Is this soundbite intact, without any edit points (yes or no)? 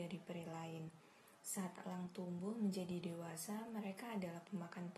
yes